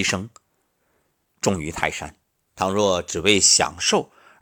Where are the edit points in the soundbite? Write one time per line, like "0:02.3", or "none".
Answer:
0:02.5